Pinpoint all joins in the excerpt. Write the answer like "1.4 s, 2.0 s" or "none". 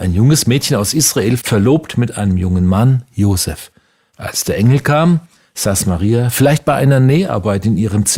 1.4 s, 4.1 s